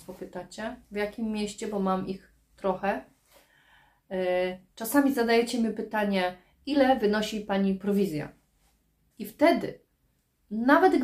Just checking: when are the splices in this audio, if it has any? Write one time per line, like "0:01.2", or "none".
0:09.1